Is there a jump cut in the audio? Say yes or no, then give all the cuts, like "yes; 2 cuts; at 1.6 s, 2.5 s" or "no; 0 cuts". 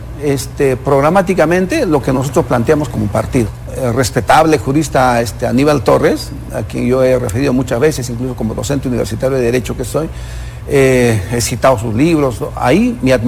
no; 0 cuts